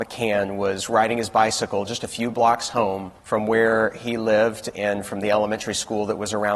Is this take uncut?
no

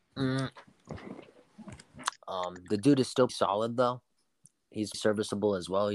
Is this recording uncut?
no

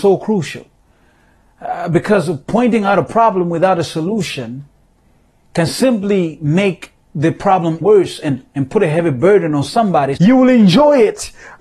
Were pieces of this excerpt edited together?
yes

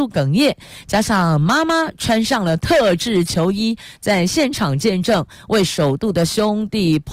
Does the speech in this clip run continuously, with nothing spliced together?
yes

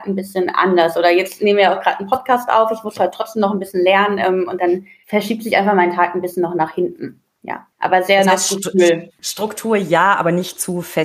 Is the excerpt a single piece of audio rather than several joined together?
yes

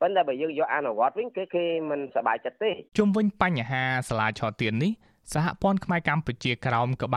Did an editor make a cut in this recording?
yes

